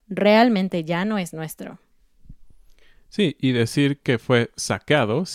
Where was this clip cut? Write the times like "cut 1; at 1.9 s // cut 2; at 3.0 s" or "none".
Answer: none